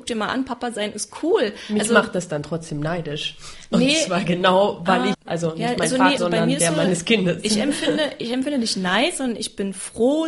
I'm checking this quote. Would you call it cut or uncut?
cut